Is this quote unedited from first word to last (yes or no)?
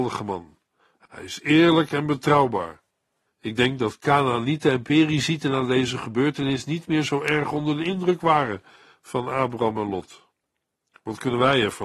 no